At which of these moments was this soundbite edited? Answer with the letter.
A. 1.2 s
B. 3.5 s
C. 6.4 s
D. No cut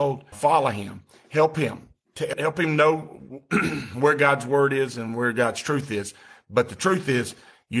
D